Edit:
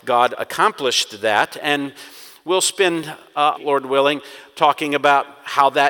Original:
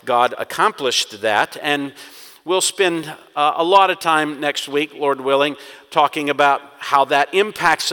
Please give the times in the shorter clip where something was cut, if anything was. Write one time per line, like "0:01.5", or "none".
0:03.5